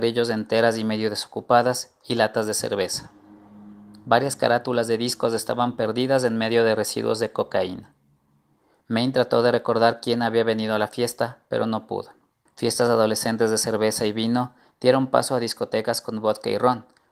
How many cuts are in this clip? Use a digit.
1